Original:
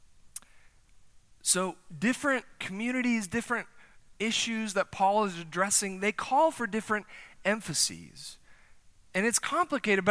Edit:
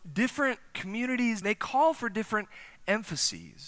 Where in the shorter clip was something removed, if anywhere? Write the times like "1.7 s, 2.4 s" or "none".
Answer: 1.4 s